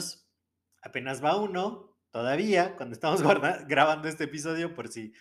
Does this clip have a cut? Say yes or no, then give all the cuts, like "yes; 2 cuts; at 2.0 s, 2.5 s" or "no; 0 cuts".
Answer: no; 0 cuts